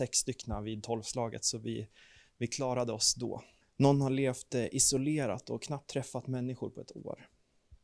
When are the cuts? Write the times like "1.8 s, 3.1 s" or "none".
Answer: 3.6 s